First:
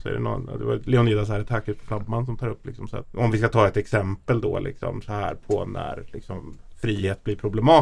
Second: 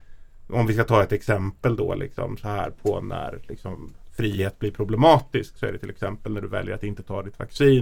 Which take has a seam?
first; 1 cut; at 3.0 s

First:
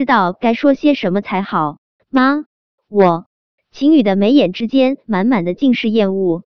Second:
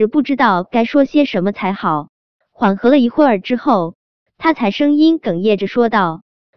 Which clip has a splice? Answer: first; 1 cut; at 1.9 s

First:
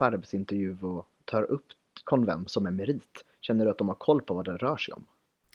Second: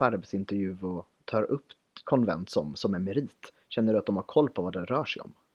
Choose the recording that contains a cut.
first; 1 cut; at 2.5 s

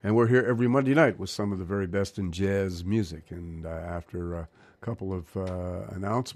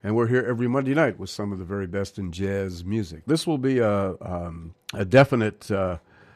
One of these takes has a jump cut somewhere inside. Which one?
second; 2 cuts; at 3.2 s, 4.8 s

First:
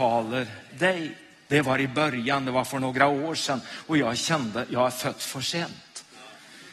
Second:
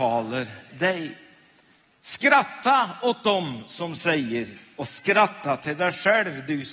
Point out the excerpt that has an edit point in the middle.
first; 1 cut; at 1.5 s

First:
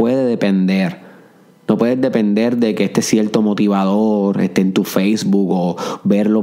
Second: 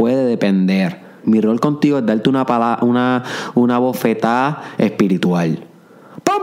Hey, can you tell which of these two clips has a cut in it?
second; 1 cut; at 1.2 s

